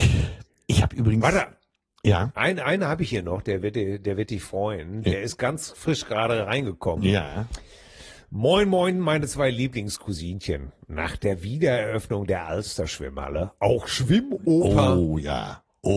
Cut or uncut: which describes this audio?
uncut